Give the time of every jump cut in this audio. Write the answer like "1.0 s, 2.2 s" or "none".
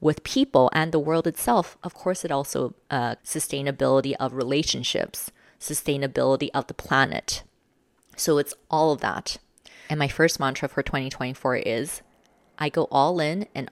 3.2 s

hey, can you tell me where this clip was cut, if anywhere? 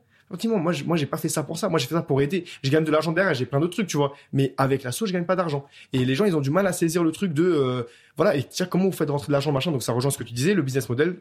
none

